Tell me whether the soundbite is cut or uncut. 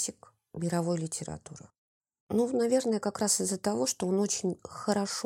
uncut